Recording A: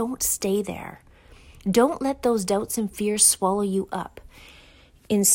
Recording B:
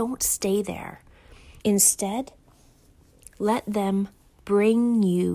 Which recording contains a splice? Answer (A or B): B